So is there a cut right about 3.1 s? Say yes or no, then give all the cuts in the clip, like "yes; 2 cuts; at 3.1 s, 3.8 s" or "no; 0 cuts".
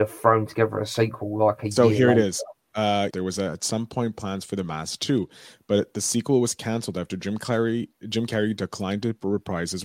yes; 1 cut; at 3.1 s